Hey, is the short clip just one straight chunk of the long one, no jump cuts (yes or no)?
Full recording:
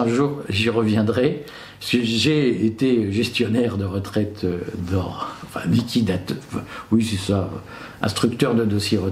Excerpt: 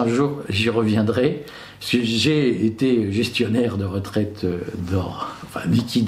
yes